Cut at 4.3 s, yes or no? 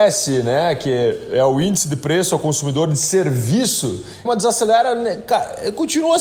yes